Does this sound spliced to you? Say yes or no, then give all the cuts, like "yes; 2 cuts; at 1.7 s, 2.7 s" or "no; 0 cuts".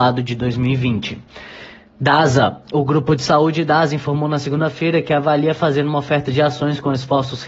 no; 0 cuts